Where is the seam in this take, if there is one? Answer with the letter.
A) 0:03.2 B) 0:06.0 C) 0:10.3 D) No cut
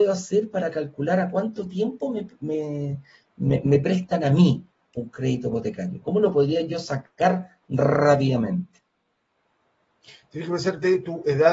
B